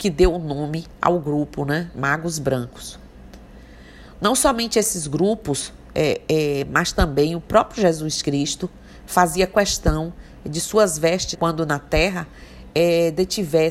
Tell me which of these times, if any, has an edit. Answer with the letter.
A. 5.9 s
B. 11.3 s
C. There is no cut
B